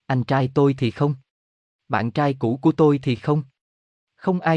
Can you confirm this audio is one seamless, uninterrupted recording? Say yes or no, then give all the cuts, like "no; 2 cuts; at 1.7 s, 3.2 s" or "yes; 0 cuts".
yes; 0 cuts